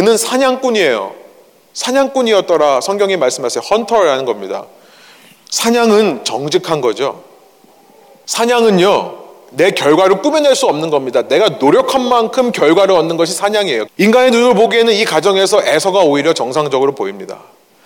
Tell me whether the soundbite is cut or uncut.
cut